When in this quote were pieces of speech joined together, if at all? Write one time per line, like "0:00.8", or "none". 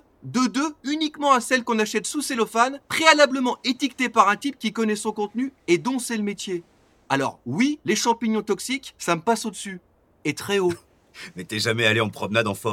none